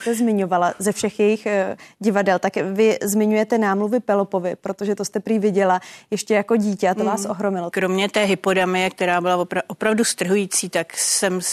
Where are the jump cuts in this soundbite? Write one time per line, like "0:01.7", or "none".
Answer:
0:07.7